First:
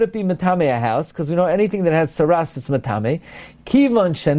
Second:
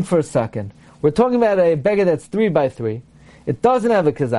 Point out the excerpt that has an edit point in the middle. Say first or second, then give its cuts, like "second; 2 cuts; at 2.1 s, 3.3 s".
first; 1 cut; at 2.5 s